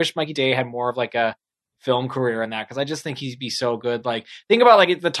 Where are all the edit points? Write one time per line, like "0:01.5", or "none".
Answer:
none